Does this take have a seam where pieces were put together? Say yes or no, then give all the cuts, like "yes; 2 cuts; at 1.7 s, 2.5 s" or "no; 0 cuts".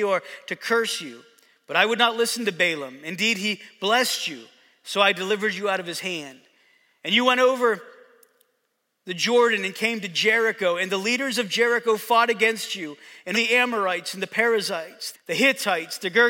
yes; 2 cuts; at 13.3 s, 15.1 s